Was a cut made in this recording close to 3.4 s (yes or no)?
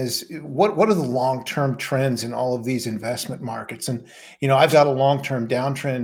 no